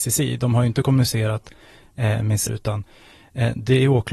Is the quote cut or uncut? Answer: cut